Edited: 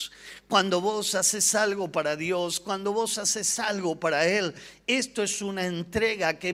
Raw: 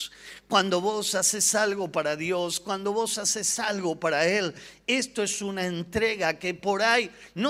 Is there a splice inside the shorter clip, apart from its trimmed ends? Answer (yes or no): no